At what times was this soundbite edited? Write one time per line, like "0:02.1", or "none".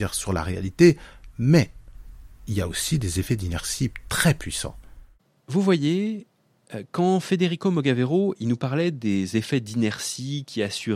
none